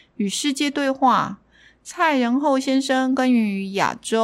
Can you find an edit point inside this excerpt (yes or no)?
no